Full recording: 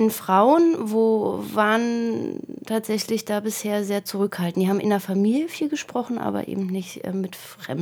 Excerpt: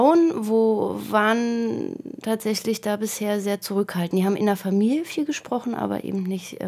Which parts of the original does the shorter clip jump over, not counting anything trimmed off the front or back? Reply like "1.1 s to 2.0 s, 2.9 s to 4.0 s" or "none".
none